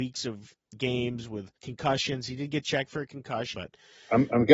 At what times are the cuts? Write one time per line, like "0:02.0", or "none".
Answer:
0:01.6
0:03.5